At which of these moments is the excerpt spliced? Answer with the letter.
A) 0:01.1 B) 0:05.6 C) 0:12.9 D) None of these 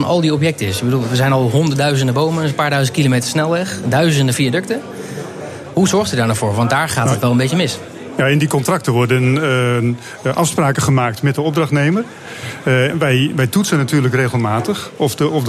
C